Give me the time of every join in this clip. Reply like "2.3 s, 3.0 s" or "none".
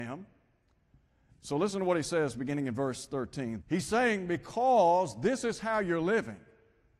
1.3 s, 3.6 s